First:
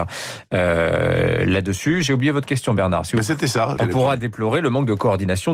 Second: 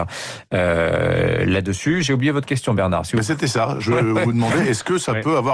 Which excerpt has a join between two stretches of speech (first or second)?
first